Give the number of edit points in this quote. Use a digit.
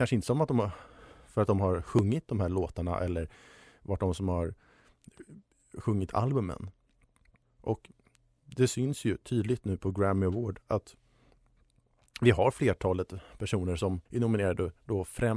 2